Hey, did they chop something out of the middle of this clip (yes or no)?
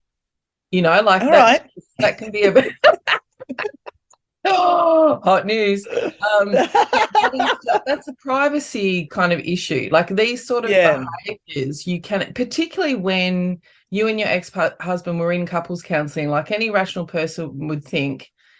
no